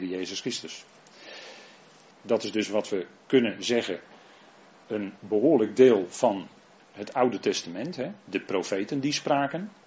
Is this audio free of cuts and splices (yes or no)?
no